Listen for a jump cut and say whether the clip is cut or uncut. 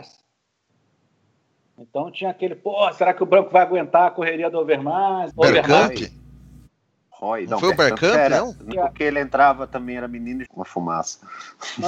cut